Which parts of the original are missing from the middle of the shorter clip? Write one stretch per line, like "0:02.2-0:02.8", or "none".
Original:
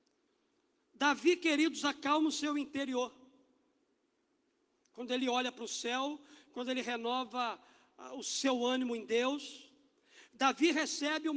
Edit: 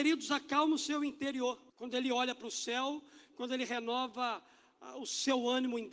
0:03.2-0:04.9